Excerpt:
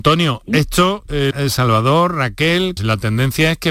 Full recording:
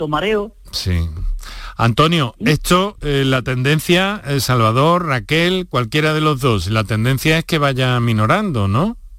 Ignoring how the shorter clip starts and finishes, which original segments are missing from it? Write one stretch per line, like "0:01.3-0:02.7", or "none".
0:03.2-0:04.2
0:05.7-0:06.6